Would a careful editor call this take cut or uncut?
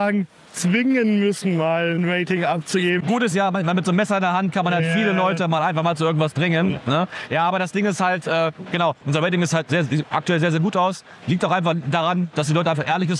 uncut